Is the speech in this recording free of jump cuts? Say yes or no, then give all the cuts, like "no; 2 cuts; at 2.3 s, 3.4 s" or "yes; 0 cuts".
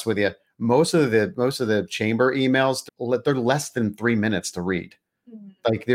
no; 1 cut; at 2.9 s